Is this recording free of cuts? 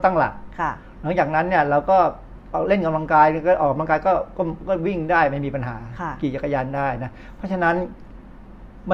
yes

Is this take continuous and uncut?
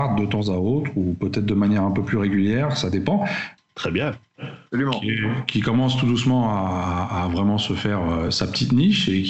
no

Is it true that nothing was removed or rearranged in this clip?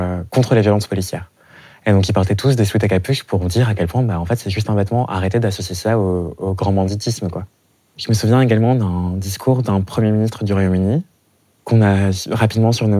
yes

